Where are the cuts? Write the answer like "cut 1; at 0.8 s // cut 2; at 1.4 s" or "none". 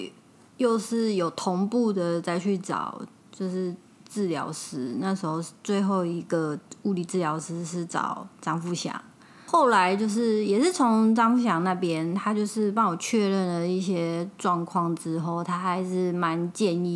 none